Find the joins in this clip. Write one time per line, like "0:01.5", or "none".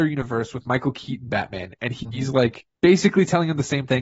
0:02.8